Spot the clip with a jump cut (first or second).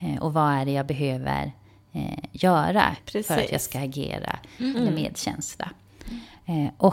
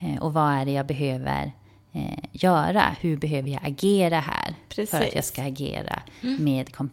first